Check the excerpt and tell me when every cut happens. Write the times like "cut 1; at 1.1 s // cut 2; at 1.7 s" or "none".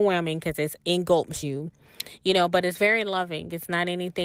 none